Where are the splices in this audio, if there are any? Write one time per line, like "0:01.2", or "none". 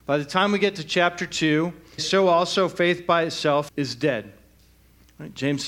0:02.0
0:03.7